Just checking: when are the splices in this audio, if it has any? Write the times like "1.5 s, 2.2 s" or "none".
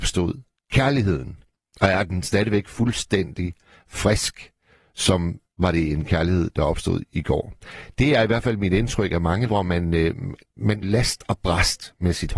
9.5 s, 10.8 s